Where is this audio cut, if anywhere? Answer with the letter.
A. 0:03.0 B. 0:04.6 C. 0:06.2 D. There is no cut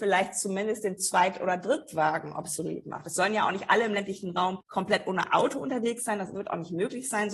D